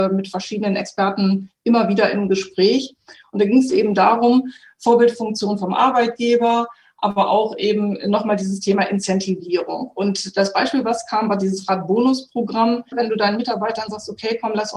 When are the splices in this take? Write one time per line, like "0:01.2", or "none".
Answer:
0:12.9